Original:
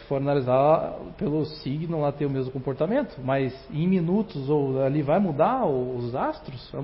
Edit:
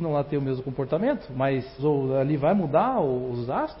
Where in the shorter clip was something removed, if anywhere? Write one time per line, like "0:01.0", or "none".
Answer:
0:01.8